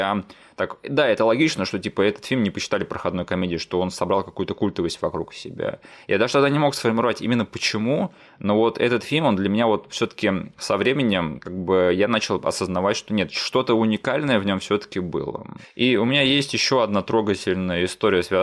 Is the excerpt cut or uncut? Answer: uncut